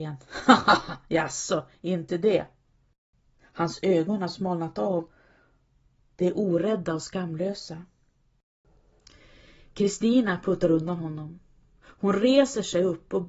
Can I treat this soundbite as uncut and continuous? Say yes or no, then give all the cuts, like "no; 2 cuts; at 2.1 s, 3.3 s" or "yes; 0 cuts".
yes; 0 cuts